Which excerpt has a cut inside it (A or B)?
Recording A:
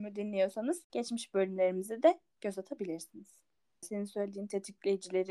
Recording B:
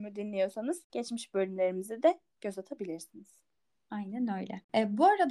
A